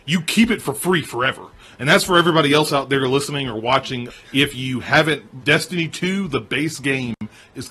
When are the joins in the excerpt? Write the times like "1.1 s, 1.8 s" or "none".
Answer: 4.1 s, 5.4 s